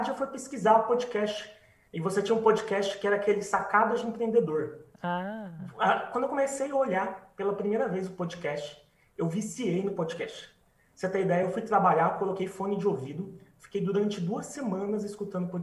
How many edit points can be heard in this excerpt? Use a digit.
0